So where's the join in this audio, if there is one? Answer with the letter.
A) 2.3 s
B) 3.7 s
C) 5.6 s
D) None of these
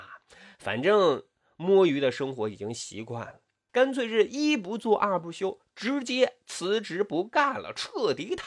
B